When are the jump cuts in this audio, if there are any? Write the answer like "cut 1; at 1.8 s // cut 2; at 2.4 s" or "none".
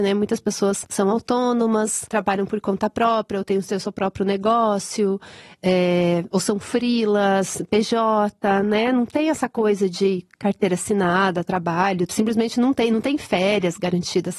cut 1; at 12.1 s